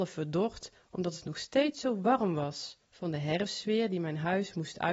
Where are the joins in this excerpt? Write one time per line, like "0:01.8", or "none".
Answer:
0:02.8